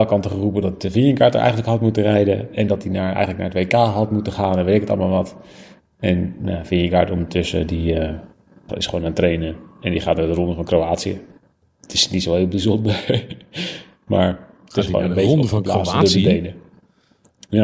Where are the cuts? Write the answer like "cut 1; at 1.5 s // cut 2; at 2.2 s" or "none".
cut 1; at 8.7 s